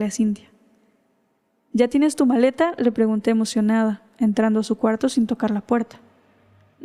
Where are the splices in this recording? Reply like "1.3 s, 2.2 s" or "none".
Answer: none